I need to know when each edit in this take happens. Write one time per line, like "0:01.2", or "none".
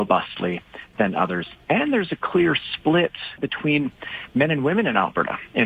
0:03.4